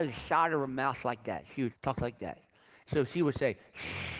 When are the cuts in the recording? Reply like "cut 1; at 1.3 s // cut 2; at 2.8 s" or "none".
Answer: cut 1; at 1.7 s